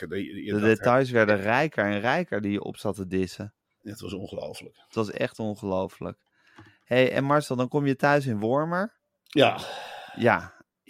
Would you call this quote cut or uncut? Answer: uncut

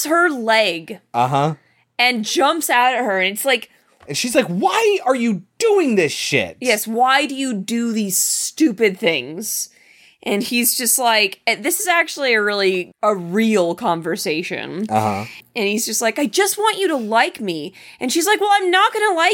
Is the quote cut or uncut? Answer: uncut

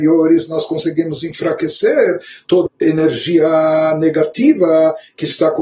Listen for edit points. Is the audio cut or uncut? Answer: cut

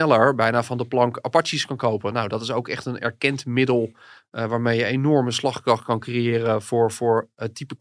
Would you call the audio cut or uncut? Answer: uncut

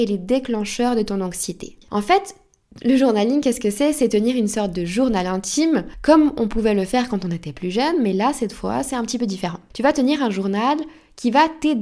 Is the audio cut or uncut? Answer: cut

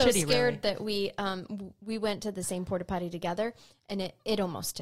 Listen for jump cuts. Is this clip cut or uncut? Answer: uncut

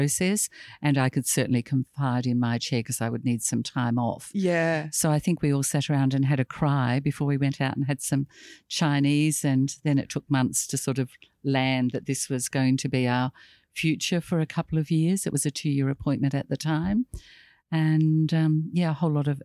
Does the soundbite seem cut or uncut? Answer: uncut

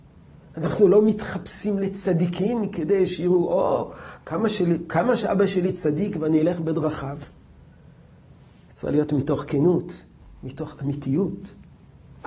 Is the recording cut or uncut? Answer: uncut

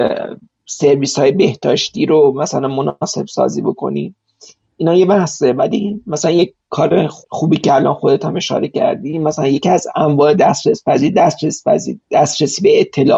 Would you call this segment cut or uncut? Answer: cut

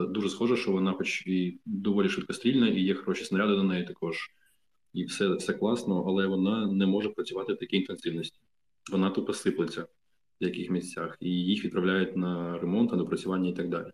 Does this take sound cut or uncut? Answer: uncut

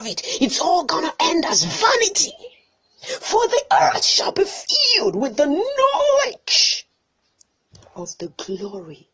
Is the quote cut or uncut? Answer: uncut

